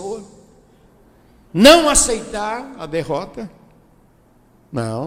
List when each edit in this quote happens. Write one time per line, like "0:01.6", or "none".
0:01.5